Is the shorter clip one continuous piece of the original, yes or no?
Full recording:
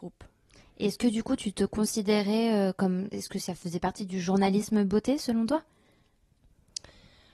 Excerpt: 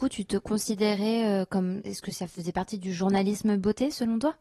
yes